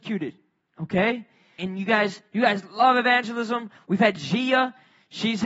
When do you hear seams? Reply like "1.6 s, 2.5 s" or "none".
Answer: 1.6 s